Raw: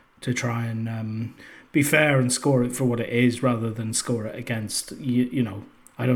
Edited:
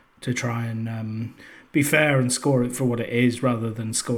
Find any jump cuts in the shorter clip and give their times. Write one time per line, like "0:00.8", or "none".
none